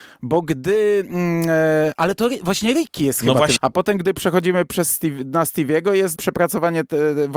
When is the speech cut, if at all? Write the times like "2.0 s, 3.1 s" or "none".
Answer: 3.6 s, 6.2 s